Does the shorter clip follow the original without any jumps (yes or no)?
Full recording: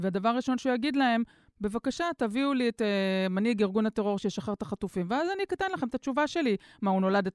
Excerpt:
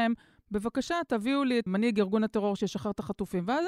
no